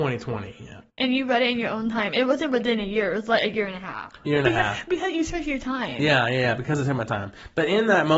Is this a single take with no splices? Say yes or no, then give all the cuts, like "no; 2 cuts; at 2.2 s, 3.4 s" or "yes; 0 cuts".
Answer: yes; 0 cuts